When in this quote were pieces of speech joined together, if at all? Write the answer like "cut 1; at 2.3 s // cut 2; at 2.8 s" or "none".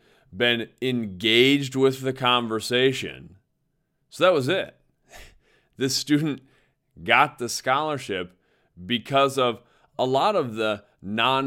none